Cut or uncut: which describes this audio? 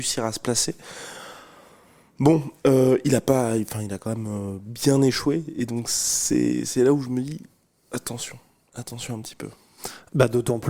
uncut